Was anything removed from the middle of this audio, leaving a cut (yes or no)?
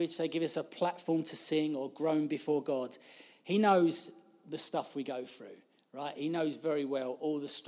no